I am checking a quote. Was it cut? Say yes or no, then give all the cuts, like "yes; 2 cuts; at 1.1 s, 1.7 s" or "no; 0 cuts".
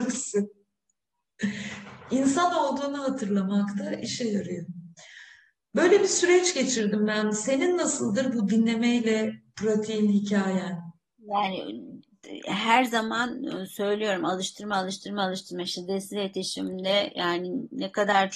no; 0 cuts